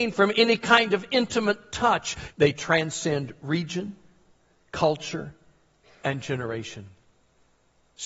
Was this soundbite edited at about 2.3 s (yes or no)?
yes